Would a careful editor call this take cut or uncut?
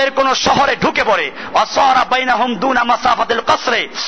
cut